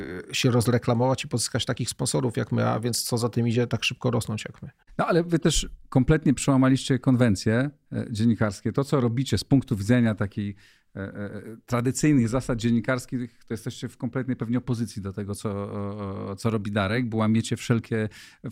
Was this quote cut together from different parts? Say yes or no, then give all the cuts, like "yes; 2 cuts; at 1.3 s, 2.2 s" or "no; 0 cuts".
no; 0 cuts